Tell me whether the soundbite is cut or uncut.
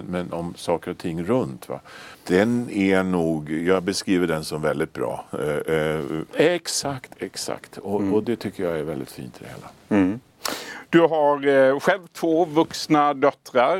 cut